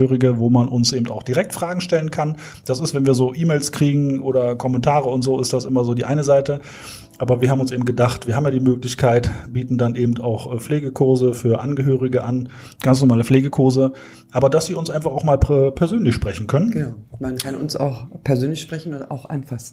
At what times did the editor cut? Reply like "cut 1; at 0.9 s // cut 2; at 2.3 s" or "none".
none